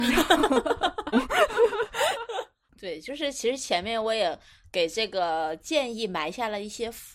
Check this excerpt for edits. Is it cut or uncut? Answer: cut